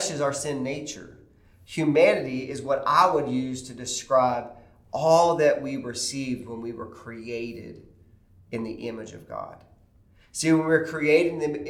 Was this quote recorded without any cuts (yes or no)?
yes